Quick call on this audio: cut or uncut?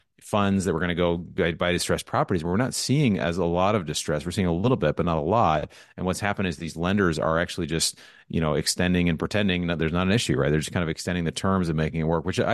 uncut